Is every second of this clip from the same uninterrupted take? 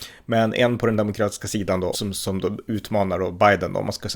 no; 1 cut; at 1.9 s

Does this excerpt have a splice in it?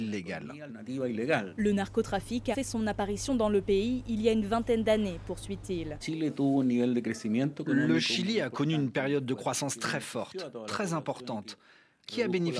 yes; 2 cuts; at 2.5 s, 6.0 s

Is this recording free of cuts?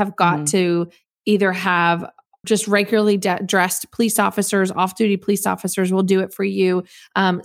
no; 1 cut; at 2.4 s

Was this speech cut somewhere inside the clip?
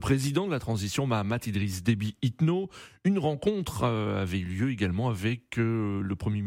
no; 0 cuts

